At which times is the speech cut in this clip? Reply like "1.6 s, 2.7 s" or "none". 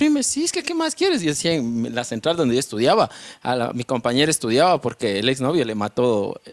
none